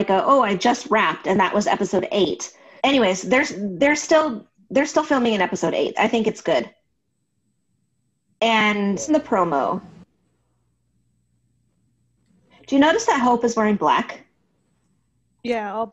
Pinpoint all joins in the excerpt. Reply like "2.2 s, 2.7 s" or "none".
2.8 s, 5.9 s, 9.1 s